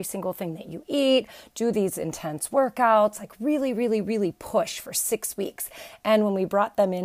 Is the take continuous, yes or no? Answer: yes